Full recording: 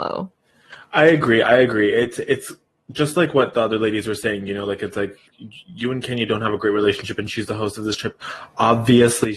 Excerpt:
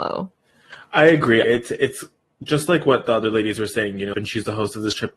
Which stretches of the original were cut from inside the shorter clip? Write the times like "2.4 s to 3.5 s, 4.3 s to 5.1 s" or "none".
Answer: 1.4 s to 1.9 s, 4.6 s to 7.2 s

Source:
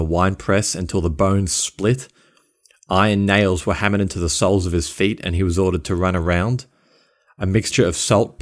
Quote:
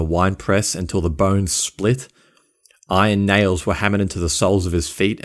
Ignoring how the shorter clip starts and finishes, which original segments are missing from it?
none

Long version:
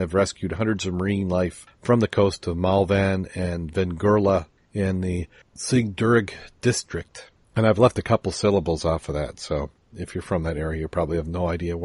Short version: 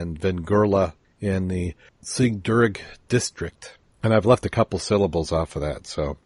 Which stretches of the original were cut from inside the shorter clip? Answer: none

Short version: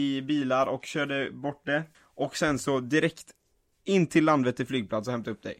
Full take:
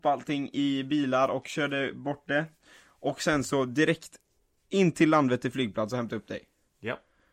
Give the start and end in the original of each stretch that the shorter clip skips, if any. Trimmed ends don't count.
2.6 s to 2.8 s

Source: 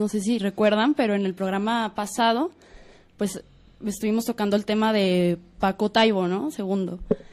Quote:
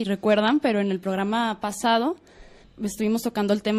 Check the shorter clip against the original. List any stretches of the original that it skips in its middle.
3.0 s to 3.6 s

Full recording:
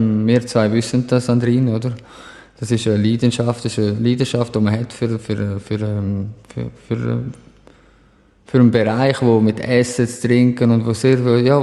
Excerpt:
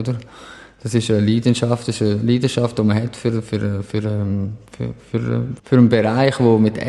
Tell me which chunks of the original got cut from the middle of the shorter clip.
7.4 s to 8.4 s

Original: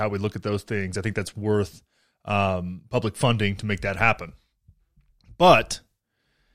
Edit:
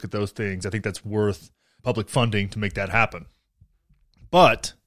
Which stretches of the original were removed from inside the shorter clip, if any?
2.1 s to 2.9 s

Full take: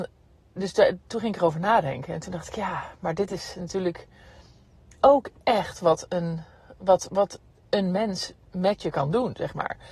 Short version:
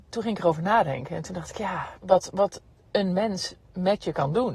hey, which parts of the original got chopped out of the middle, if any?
3.0 s to 6.8 s

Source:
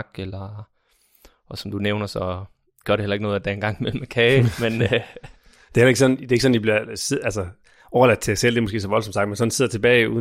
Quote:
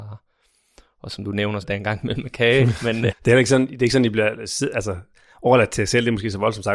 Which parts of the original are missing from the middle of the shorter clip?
2.1 s to 3.4 s, 4.9 s to 5.6 s

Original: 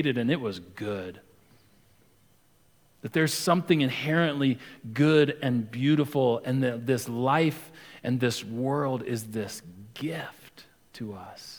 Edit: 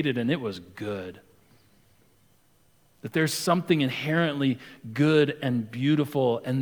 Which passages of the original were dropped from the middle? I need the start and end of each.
none

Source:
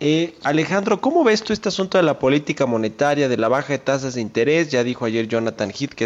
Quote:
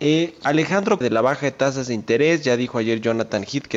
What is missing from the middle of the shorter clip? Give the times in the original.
1.0 s to 3.3 s

